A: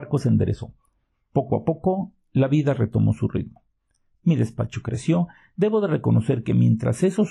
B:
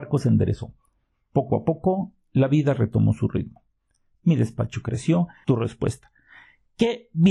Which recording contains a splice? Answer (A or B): B